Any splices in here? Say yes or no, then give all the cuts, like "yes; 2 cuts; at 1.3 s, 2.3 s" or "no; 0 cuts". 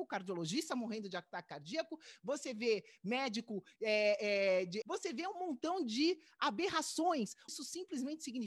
yes; 2 cuts; at 4.8 s, 7.5 s